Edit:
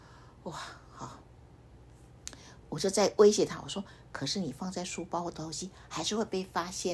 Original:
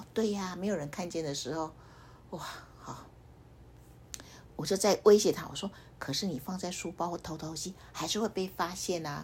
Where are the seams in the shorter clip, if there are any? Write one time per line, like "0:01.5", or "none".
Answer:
0:05.3

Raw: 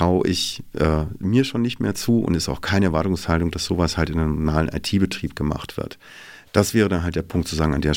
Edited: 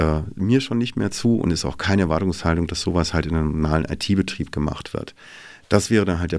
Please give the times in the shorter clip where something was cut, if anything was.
none

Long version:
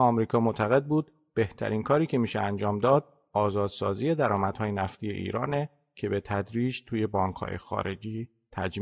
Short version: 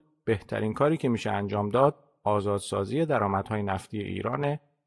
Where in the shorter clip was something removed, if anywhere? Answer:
none

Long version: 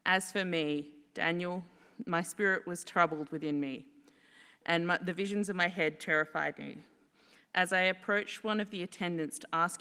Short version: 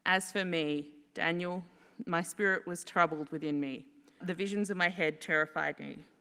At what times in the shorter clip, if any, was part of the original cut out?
0:04.2

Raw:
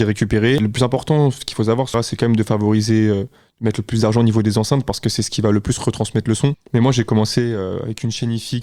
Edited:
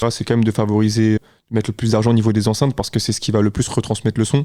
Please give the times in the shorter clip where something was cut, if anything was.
0:01.2

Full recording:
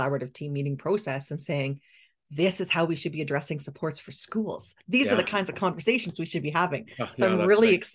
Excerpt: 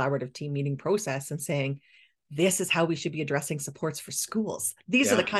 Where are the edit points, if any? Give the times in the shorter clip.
none

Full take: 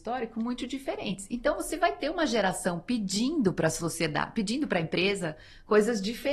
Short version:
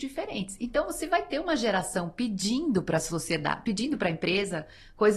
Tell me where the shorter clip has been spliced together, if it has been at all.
none

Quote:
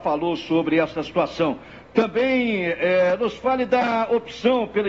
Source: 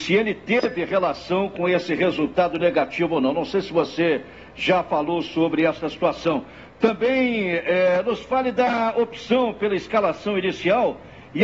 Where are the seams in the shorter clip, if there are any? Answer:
none

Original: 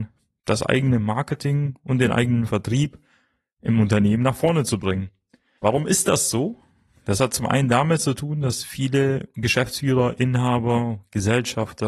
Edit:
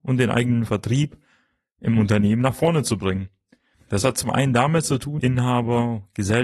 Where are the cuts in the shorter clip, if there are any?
0:03.7
0:05.2

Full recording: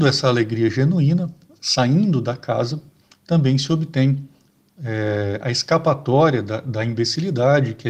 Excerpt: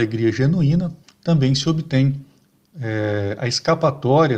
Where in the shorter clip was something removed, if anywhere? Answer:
0:01.0

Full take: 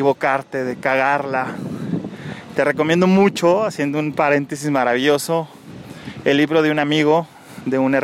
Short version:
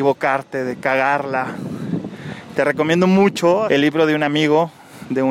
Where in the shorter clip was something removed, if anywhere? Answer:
0:03.7

